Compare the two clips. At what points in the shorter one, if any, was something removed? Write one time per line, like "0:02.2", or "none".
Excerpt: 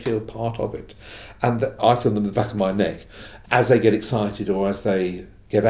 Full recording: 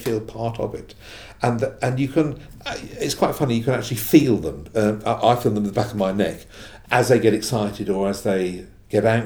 0:01.8